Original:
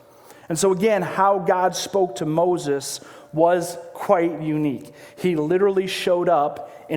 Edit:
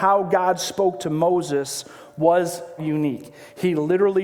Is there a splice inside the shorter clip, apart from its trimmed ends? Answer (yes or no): yes